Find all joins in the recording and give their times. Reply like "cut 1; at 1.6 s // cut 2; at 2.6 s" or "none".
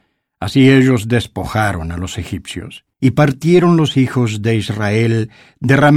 cut 1; at 2.9 s